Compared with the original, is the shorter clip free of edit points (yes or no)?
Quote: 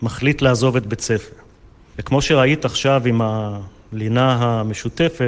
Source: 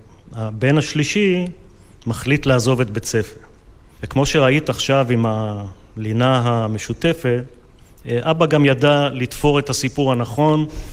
yes